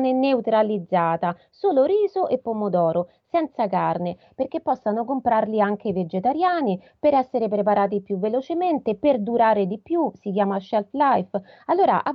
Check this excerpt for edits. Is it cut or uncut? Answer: uncut